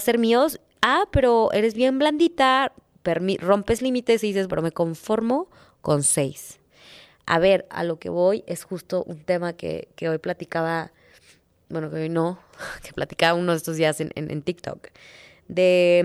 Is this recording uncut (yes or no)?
no